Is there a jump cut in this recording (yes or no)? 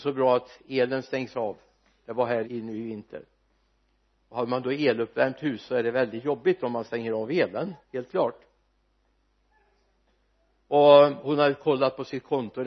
yes